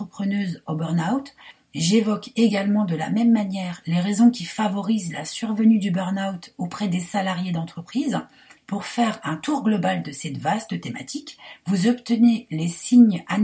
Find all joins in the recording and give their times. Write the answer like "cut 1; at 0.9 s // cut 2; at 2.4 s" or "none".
cut 1; at 8.6 s